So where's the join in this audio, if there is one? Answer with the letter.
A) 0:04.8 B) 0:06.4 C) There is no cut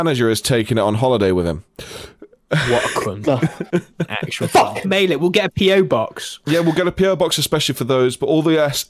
A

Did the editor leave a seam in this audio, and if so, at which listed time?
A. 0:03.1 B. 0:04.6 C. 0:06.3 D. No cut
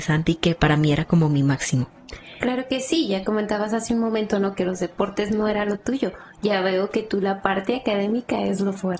D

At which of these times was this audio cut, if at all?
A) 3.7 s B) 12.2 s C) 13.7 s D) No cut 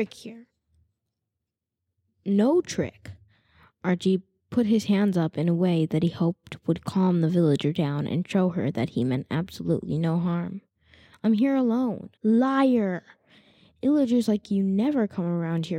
B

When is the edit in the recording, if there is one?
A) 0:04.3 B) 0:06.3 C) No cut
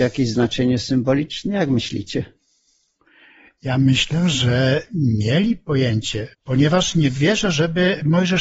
B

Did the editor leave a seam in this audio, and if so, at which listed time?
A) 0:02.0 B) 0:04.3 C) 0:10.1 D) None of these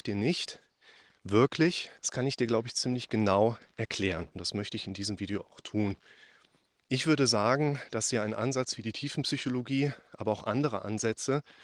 A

